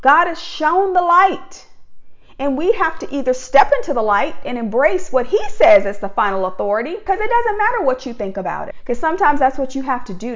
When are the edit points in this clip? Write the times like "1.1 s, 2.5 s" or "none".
7.1 s, 8.7 s